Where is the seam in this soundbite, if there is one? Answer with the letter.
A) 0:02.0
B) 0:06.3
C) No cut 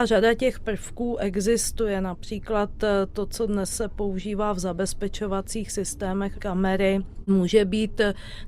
B